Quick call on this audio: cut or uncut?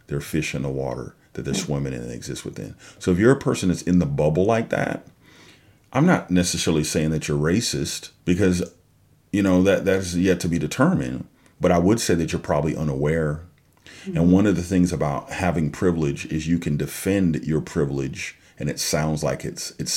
cut